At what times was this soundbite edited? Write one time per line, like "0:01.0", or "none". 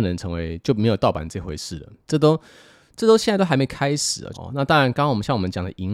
0:02.1
0:04.3